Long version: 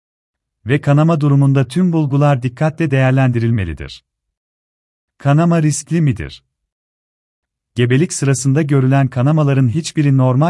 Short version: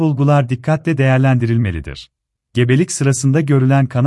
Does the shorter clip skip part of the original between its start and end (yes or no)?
yes